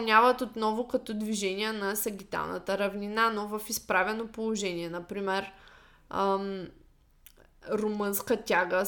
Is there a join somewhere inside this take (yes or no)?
no